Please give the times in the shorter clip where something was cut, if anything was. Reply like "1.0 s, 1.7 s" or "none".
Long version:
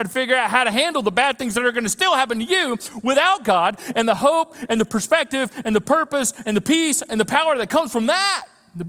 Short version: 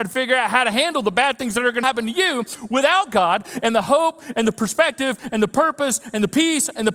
1.8 s